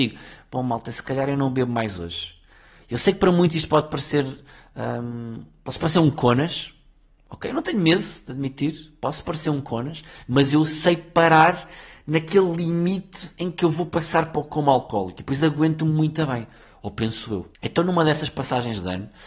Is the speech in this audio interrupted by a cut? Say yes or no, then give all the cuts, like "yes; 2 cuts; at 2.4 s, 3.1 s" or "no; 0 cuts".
yes; 1 cut; at 17.5 s